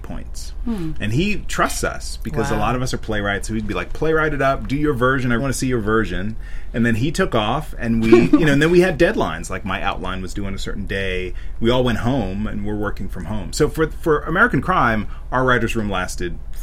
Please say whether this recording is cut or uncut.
cut